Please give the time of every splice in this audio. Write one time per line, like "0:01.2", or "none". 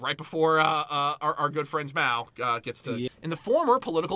0:03.1